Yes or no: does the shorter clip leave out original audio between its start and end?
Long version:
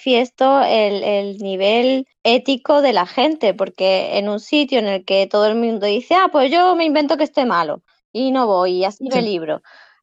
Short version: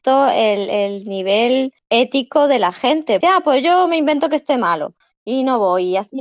yes